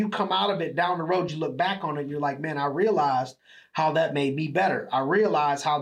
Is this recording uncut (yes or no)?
yes